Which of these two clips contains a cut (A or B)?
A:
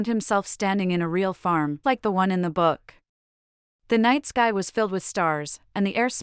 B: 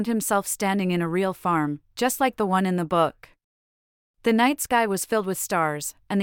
A